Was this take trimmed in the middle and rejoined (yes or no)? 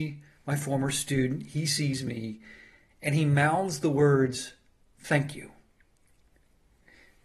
no